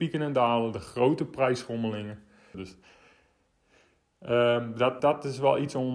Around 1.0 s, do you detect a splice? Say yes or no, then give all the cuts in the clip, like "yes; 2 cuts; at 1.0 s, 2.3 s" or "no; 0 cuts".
no; 2 cuts; at 2.5 s, 5.0 s